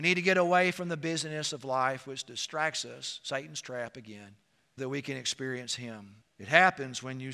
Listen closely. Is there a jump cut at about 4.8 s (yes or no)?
yes